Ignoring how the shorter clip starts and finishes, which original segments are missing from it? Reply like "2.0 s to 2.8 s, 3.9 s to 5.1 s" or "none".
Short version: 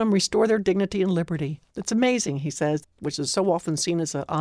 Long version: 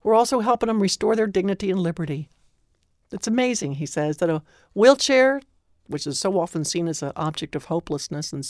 2.4 s to 3.0 s, 4.2 s to 5.7 s